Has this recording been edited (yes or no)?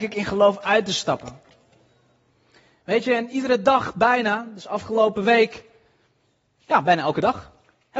no